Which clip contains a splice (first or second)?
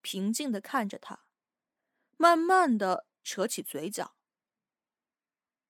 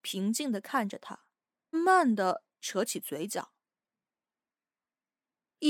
second